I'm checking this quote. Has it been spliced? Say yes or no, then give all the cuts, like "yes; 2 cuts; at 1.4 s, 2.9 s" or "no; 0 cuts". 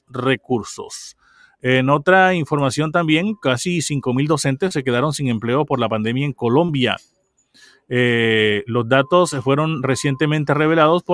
no; 0 cuts